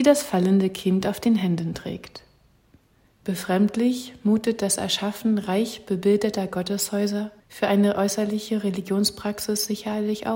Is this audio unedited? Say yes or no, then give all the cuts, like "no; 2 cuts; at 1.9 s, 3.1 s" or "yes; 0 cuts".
no; 2 cuts; at 3.1 s, 7.4 s